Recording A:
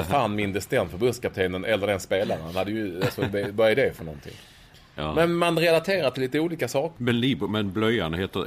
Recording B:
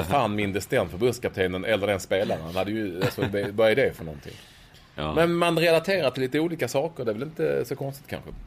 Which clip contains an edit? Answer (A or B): A